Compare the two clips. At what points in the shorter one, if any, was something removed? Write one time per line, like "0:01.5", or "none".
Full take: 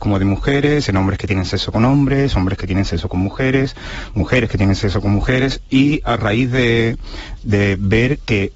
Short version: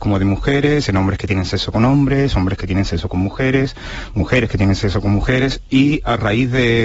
none